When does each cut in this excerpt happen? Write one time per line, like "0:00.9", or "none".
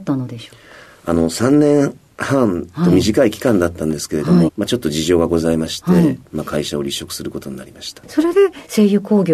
0:04.5